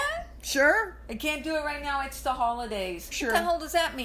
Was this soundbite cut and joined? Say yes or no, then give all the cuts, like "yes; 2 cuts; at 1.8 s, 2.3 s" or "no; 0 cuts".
yes; 1 cut; at 3.1 s